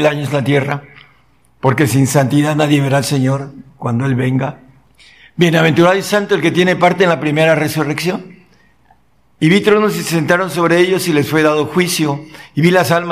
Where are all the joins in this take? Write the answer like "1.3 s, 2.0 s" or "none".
9.3 s